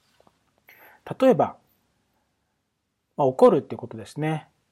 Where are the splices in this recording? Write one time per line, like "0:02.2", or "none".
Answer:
none